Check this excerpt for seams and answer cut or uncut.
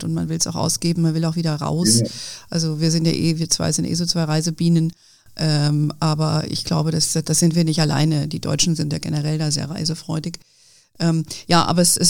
uncut